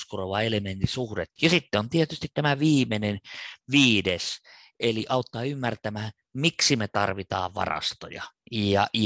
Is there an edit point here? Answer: yes; 1 cut; at 1.4 s

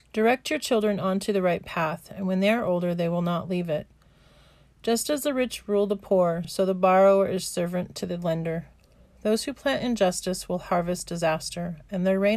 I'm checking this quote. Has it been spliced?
no; 0 cuts

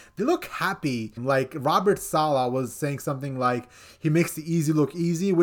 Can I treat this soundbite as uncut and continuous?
no; 1 cut; at 1.2 s

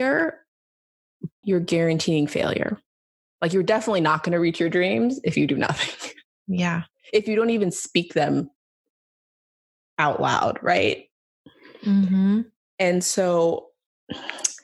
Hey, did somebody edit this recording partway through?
yes; 1 cut; at 1.4 s

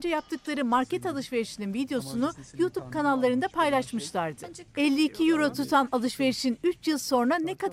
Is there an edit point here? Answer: no; 0 cuts

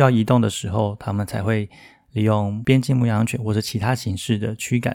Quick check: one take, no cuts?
yes; 0 cuts

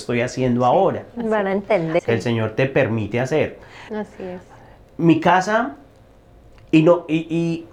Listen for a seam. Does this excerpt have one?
yes; 2 cuts; at 2.0 s, 3.9 s

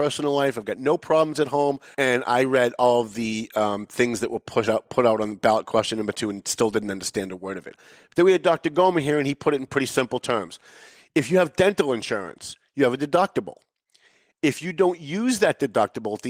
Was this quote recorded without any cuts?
no; 1 cut; at 1.9 s

